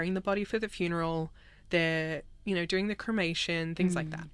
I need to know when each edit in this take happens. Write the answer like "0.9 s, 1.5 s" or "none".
none